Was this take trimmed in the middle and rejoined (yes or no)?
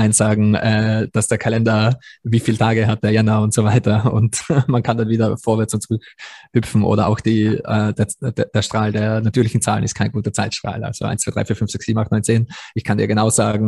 no